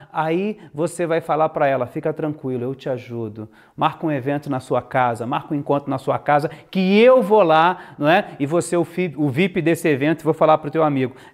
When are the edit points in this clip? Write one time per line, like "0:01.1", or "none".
none

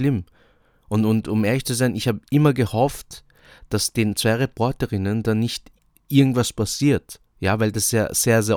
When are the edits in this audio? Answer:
none

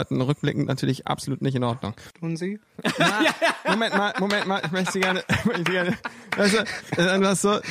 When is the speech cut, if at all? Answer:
0:02.1

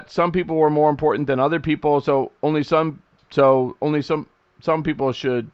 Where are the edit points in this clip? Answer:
none

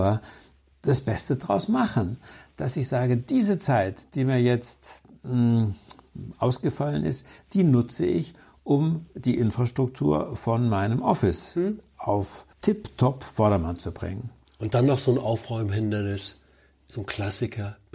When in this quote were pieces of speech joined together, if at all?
0:12.5

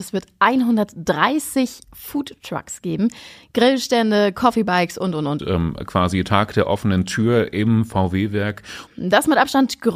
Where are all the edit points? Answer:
0:05.4
0:08.9

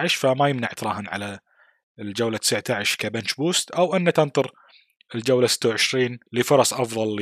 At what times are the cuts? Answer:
0:06.3

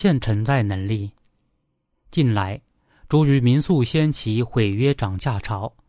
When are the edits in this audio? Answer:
none

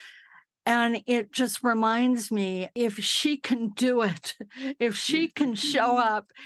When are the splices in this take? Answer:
none

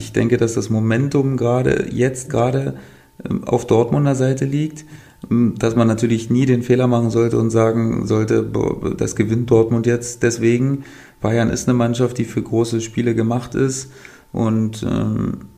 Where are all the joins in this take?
none

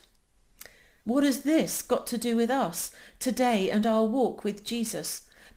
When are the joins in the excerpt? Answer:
0:01.0

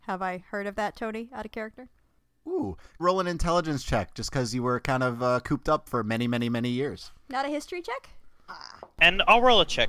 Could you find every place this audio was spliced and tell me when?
0:03.0
0:08.5

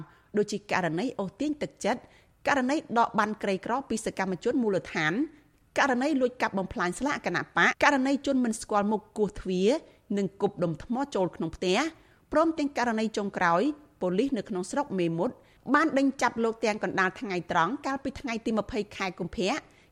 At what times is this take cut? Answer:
0:07.7

